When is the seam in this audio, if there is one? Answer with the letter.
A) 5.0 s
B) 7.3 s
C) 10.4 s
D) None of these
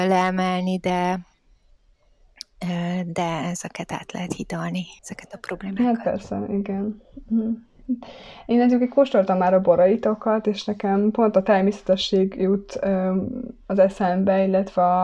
A